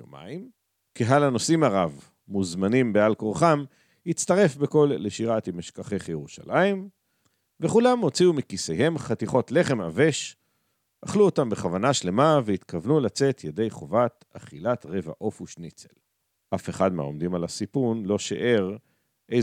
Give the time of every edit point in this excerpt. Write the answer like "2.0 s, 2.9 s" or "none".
none